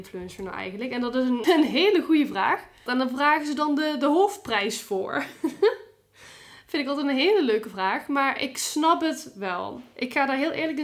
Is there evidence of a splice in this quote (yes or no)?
yes